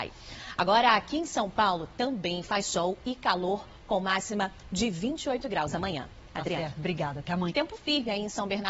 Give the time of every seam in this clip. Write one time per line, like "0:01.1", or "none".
0:07.5